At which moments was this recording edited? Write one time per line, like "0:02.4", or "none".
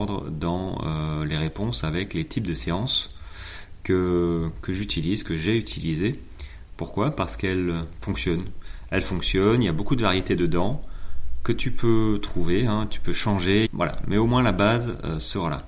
0:13.7